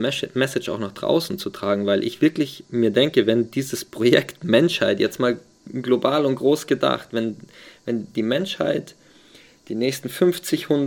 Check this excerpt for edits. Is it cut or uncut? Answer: uncut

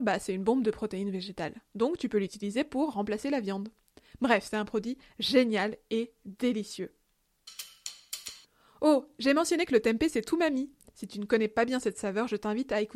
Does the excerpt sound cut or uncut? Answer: uncut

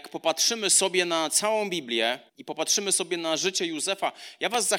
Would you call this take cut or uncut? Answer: cut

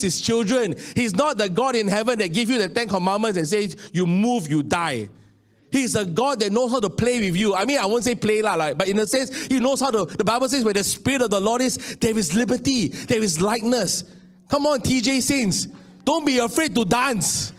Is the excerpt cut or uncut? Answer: uncut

